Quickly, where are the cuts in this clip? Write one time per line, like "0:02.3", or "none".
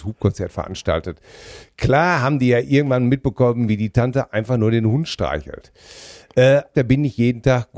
0:06.7